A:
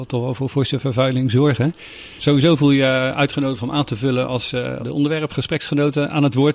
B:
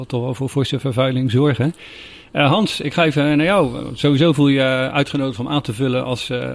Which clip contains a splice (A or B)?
A